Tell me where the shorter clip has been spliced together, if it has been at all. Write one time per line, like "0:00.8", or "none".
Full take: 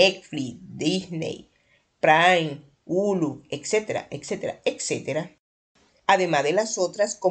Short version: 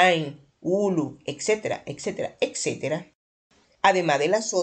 none